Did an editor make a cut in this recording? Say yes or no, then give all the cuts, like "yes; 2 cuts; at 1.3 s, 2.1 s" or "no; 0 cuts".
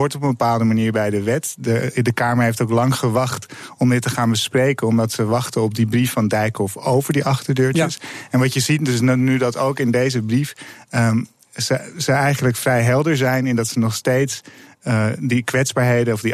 no; 0 cuts